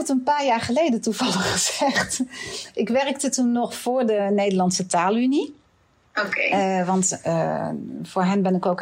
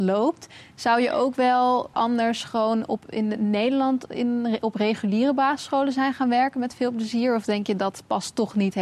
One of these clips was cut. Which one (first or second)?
second